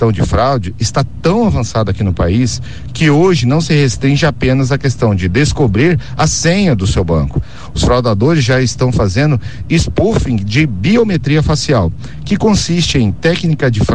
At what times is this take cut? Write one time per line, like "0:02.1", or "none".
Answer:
none